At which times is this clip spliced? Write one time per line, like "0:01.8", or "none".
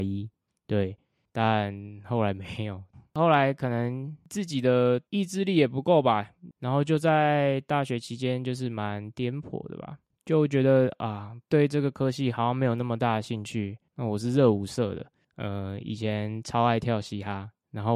0:06.5
0:13.9